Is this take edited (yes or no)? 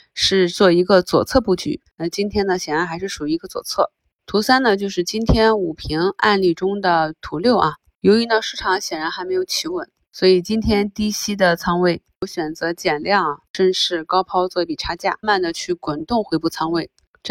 yes